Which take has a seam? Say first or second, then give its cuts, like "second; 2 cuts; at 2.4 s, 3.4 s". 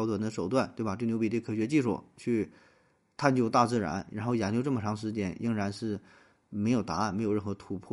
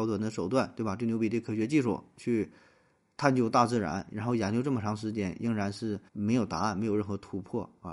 second; 1 cut; at 6.1 s